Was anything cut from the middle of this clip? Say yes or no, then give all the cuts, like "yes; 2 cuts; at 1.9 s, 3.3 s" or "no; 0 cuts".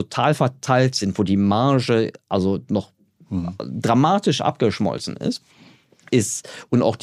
no; 0 cuts